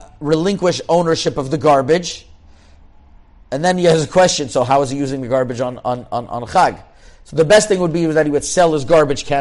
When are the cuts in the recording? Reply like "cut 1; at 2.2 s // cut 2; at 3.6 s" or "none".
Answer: none